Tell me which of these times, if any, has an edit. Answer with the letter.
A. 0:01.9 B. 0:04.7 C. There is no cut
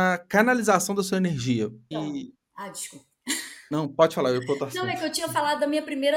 A